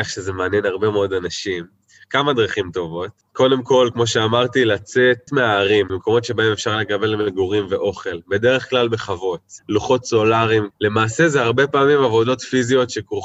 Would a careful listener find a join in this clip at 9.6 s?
yes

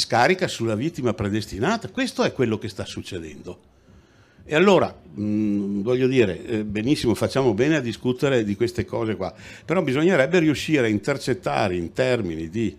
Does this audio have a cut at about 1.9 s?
no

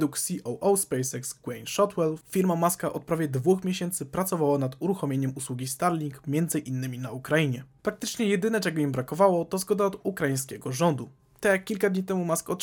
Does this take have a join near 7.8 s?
no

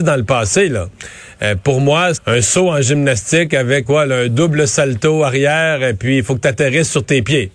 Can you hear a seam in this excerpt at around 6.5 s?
no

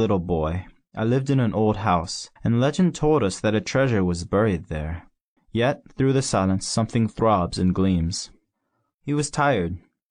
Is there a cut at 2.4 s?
yes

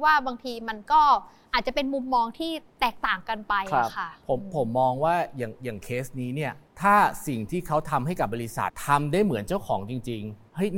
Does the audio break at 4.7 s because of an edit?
no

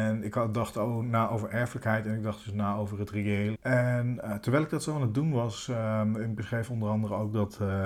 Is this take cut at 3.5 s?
yes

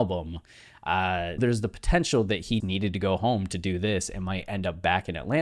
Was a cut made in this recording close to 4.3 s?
no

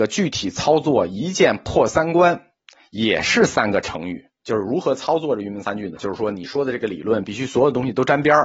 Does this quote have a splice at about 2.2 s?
no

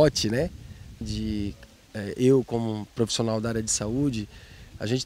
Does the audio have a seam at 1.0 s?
yes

